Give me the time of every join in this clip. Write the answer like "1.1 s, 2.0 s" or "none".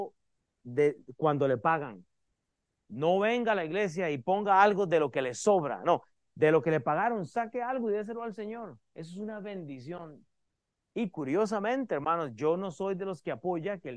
10.8 s

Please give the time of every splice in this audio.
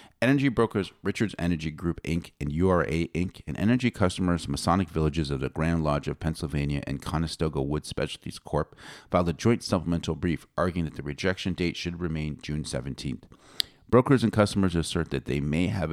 none

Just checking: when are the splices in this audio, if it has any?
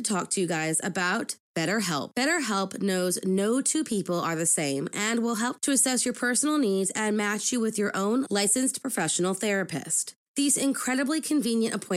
none

